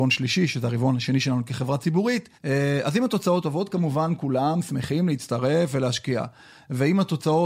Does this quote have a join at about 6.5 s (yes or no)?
no